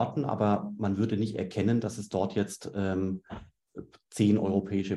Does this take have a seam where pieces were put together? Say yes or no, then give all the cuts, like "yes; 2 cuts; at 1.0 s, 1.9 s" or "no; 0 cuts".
no; 0 cuts